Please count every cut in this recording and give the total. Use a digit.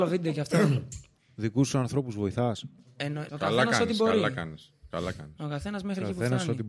1